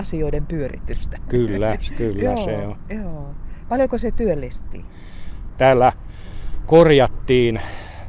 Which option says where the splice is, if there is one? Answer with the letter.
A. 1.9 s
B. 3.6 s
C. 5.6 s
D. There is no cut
C